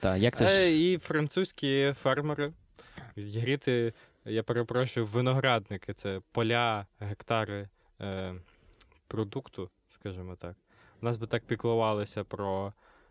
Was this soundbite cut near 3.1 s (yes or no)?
yes